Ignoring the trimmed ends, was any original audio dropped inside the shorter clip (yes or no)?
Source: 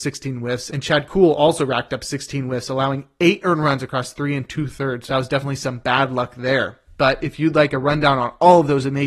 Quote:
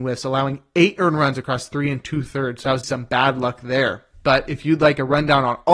yes